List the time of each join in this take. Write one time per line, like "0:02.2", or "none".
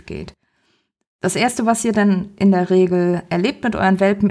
none